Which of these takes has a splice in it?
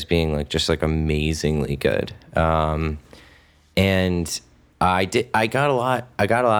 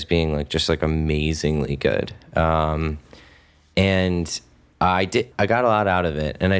second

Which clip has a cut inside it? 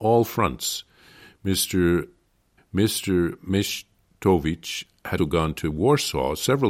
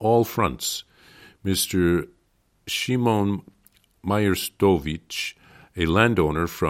first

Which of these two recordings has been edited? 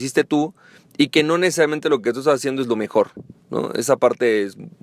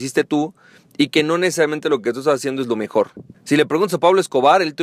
second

